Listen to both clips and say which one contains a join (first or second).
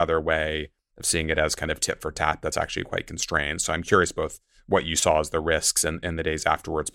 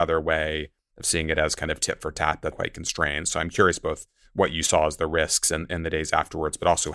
second